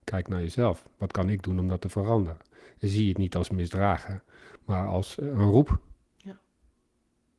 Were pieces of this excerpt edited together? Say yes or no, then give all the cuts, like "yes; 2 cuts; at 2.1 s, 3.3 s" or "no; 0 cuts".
no; 0 cuts